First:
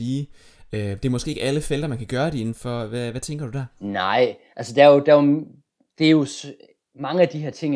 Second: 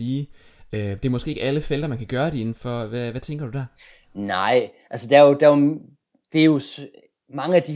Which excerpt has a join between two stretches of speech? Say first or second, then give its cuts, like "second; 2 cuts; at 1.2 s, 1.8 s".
first; 1 cut; at 3.7 s